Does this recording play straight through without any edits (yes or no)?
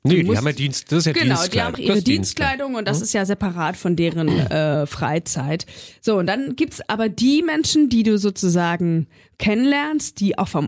no